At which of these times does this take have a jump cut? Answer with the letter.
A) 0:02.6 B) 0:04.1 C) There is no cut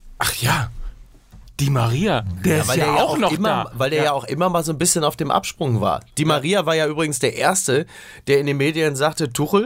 C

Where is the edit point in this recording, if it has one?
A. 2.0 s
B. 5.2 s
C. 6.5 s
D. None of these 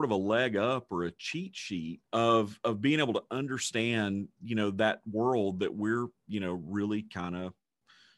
A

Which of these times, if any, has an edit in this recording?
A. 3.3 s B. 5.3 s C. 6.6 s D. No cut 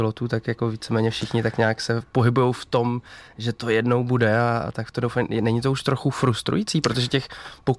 D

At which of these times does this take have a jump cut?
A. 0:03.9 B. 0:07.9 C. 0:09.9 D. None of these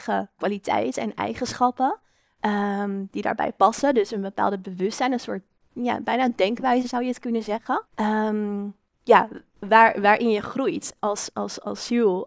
B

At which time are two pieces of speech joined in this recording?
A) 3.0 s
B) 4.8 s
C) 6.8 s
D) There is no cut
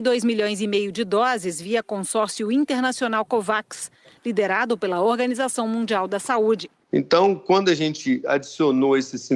D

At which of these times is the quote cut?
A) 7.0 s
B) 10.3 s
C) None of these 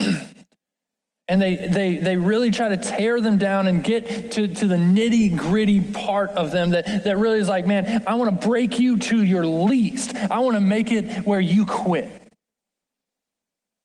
C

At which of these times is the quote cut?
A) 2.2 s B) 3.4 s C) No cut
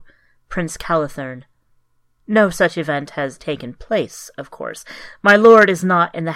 B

